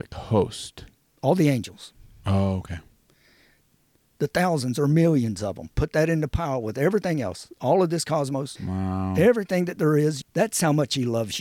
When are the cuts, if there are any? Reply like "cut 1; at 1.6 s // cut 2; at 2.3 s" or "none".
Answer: cut 1; at 8.6 s // cut 2; at 10.2 s